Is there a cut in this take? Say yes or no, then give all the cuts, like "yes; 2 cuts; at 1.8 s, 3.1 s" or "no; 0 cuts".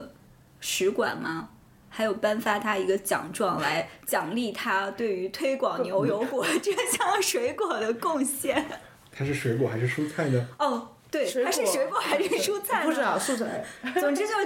no; 0 cuts